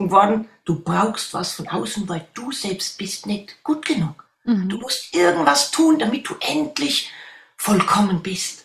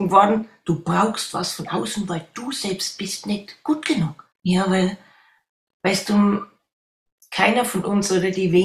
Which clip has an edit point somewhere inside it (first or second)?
second